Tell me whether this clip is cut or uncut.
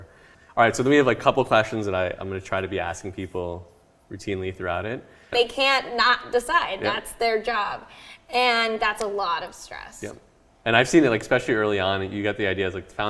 cut